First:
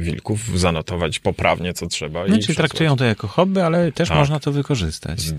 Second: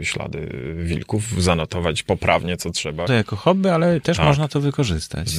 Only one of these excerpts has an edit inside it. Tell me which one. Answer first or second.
second